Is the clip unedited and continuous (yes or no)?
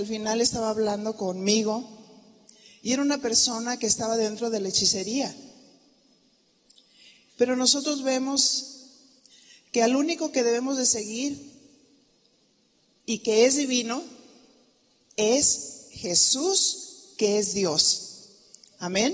no